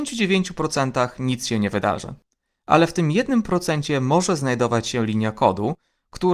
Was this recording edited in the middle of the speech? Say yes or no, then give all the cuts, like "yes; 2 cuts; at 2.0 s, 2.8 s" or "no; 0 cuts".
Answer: no; 0 cuts